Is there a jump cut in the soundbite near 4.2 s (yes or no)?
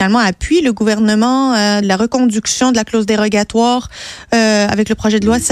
no